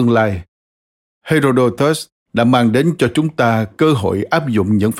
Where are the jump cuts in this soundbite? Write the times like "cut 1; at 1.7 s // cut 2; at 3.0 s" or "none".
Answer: cut 1; at 1.1 s